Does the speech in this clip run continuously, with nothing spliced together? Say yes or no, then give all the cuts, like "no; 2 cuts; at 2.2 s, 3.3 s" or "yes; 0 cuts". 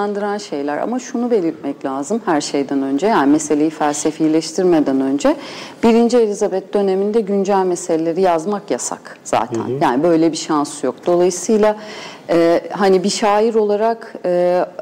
yes; 0 cuts